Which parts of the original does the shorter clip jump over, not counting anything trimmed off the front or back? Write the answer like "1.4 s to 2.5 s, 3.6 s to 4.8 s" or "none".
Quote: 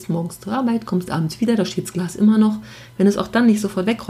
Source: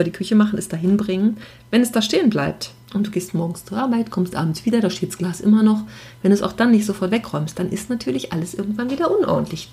none